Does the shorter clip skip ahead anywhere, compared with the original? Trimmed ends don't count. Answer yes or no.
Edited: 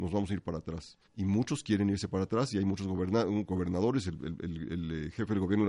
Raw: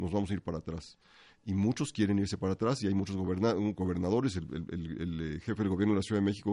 yes